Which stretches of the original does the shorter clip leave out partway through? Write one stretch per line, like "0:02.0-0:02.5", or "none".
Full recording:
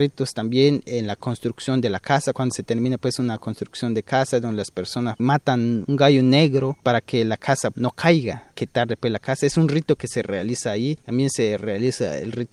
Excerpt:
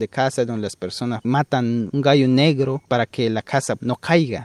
none